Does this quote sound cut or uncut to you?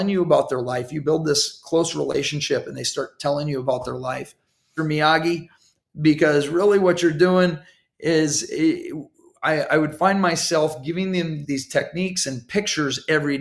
cut